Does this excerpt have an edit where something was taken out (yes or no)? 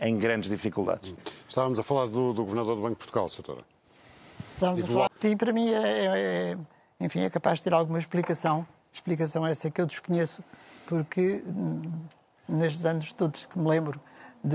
yes